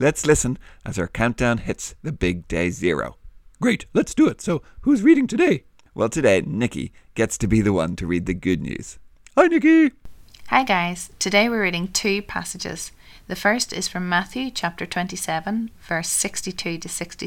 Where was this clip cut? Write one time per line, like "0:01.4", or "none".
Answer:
none